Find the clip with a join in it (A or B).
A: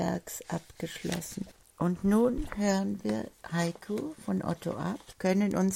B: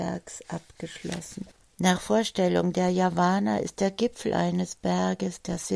A